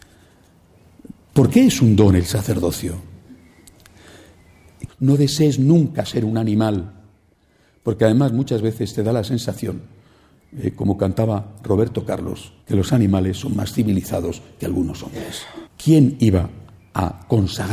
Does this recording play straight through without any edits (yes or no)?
no